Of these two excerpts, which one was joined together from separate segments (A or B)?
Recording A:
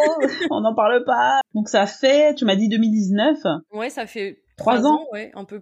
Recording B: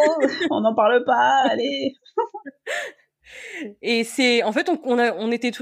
A